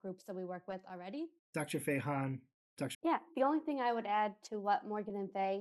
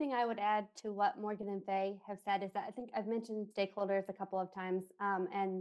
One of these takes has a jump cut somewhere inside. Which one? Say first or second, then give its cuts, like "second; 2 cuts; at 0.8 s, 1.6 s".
first; 2 cuts; at 1.4 s, 2.9 s